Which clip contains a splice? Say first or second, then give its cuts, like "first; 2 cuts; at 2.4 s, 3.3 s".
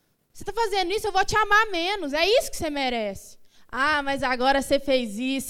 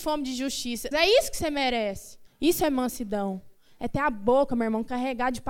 second; 2 cuts; at 0.9 s, 2.3 s